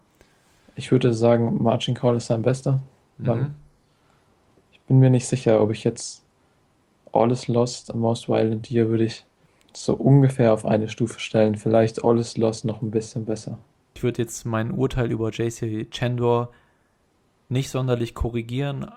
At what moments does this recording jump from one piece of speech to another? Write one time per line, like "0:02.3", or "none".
none